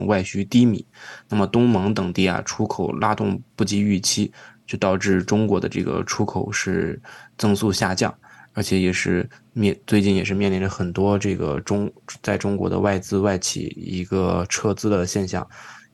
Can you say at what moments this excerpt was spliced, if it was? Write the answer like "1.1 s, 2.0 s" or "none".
none